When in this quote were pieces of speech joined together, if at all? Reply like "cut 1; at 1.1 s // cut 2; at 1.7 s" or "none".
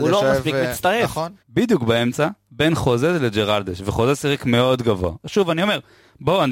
cut 1; at 1.4 s // cut 2; at 5.2 s